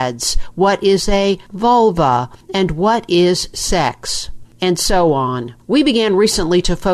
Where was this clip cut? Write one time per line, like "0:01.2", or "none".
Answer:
none